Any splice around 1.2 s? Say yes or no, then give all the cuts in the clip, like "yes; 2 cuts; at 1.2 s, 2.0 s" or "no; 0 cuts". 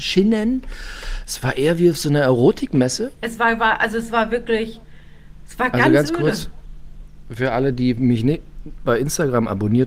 no; 1 cut; at 3.2 s